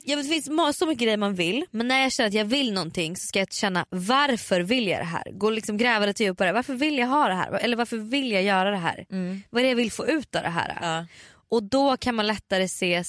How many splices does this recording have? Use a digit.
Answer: 0